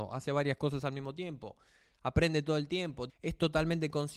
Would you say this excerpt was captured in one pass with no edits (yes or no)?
no